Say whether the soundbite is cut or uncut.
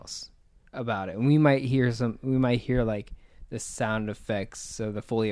uncut